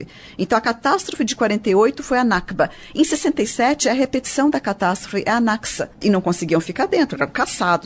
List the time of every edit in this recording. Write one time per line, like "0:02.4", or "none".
0:06.0

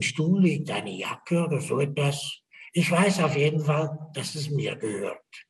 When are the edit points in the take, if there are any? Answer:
none

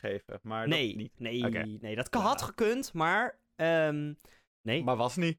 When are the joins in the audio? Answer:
none

